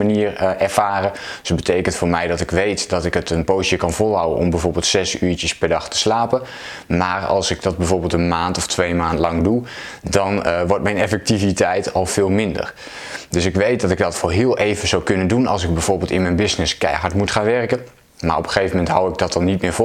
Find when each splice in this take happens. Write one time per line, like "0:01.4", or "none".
none